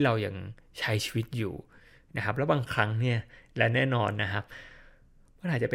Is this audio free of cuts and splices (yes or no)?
yes